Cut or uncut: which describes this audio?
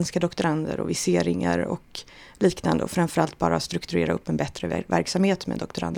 uncut